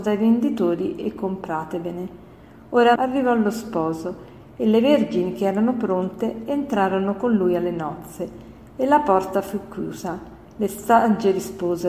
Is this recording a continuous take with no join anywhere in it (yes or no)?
no